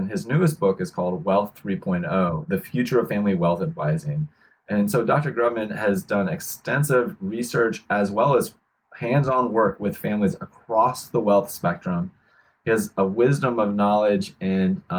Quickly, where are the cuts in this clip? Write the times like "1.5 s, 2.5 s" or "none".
none